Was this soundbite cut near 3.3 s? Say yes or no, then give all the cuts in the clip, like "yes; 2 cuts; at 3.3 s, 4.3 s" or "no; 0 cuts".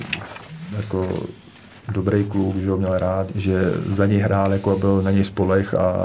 yes; 1 cut; at 3.3 s